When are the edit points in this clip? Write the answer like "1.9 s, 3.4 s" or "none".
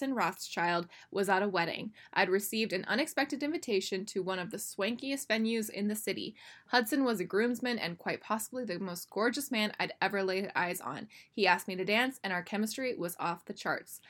none